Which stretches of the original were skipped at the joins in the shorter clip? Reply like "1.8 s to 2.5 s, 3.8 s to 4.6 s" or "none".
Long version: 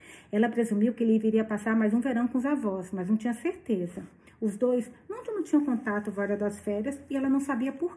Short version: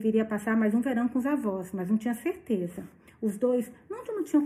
none